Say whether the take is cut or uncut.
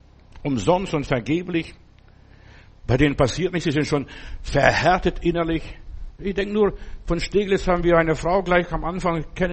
uncut